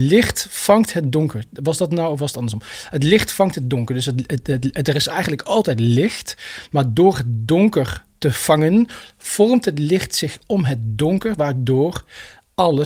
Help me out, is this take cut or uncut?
uncut